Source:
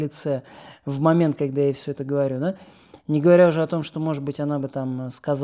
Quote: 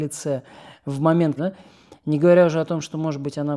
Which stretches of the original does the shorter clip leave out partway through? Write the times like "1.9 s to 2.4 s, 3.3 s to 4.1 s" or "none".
1.4 s to 2.4 s